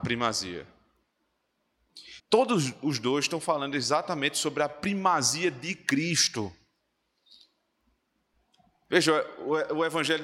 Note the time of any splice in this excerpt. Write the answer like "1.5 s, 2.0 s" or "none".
2.2 s